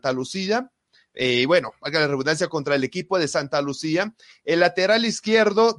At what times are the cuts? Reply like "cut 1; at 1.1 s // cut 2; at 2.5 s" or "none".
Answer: none